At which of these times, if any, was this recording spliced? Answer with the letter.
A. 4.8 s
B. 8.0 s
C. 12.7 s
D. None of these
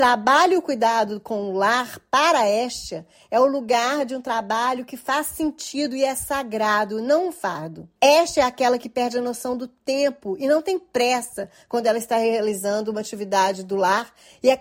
B